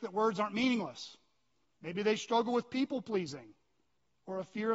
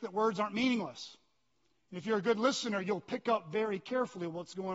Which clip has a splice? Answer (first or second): first